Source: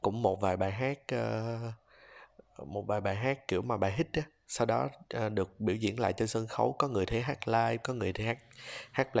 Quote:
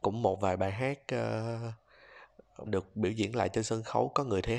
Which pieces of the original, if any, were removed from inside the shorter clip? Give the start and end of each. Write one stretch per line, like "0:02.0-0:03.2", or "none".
0:02.7-0:05.3